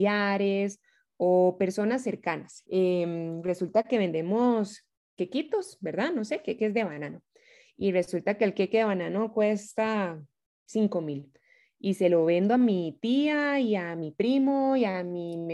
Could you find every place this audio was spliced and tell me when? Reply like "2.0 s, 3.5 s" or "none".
2.6 s